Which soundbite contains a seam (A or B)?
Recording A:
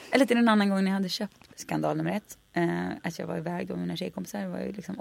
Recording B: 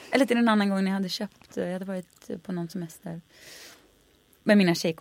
A